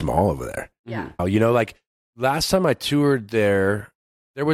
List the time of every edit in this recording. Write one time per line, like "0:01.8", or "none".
0:01.2